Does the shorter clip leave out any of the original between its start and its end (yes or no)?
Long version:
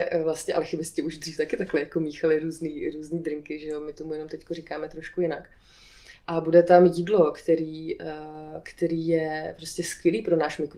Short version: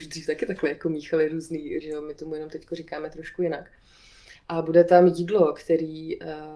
yes